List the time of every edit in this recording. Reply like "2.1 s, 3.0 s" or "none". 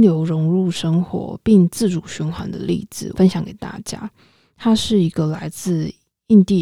3.1 s